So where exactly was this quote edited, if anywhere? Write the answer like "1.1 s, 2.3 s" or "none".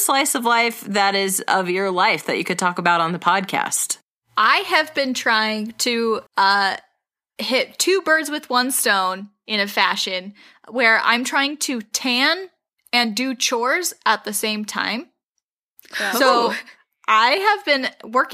6.3 s